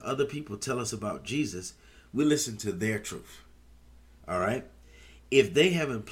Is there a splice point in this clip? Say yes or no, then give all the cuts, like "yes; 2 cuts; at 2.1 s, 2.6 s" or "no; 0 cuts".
no; 0 cuts